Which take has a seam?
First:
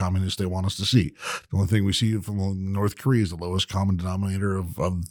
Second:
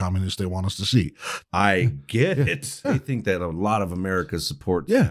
second; 2 cuts; at 1.4 s, 2.8 s

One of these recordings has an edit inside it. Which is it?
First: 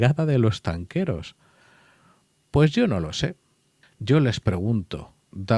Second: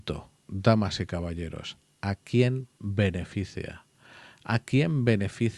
first; 1 cut; at 3.8 s

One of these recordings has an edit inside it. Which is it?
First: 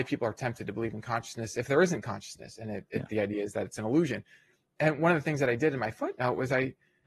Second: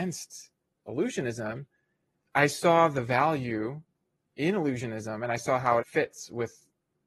second; 1 cut; at 5.8 s

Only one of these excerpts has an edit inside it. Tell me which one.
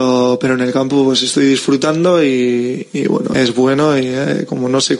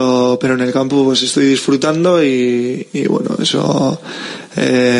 first; 1 cut; at 3.3 s

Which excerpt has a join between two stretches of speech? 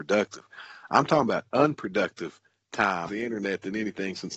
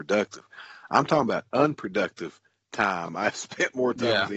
first; 1 cut; at 3.1 s

